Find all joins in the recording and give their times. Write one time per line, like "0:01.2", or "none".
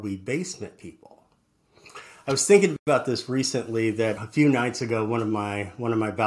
0:04.2